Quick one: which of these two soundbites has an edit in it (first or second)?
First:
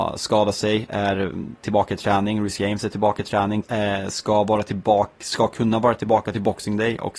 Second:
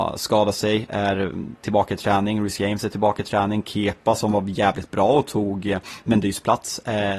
first